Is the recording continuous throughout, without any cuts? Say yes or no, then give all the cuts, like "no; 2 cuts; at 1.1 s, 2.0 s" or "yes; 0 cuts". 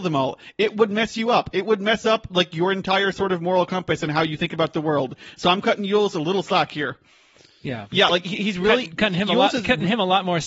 yes; 0 cuts